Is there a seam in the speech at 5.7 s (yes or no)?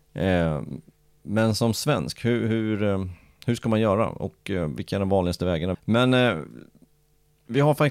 yes